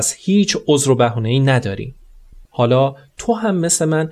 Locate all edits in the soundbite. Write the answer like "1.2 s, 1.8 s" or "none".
2.5 s